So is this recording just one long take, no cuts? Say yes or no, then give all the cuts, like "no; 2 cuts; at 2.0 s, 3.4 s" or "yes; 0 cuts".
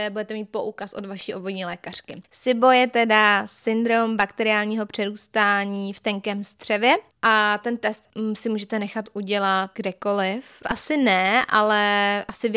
no; 2 cuts; at 2.3 s, 10.6 s